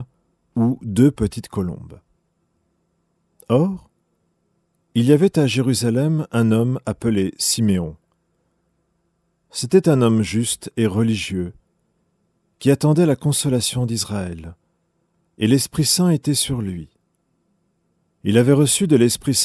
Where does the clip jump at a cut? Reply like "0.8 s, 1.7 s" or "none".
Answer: none